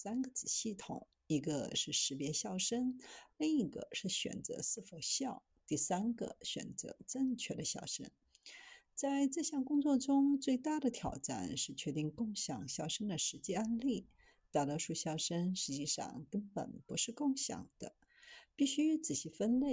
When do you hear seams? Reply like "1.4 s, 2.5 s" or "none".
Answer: none